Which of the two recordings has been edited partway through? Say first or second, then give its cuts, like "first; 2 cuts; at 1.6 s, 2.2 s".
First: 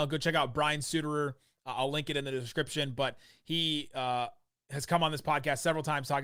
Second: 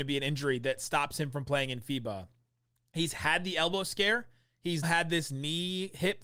second; 1 cut; at 4.8 s